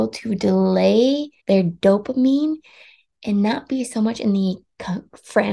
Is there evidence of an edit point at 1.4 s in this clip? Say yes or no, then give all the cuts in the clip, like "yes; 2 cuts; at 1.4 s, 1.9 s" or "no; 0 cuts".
yes; 1 cut; at 1.4 s